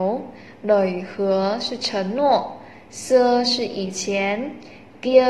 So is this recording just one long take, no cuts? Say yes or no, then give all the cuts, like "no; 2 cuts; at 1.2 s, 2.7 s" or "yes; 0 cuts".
yes; 0 cuts